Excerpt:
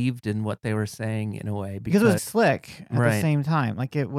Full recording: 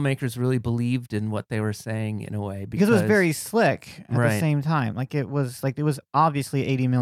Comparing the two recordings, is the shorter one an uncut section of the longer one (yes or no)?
no